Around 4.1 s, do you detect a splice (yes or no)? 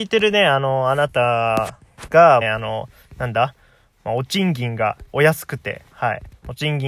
no